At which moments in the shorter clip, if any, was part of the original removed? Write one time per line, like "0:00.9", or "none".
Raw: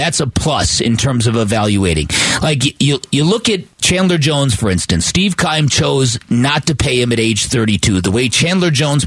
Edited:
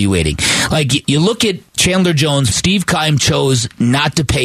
0:01.0
0:02.5